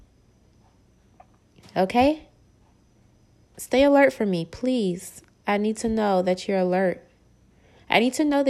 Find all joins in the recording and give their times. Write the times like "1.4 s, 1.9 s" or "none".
3.5 s